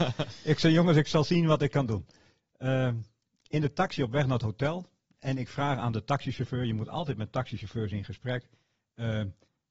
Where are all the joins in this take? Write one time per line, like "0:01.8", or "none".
none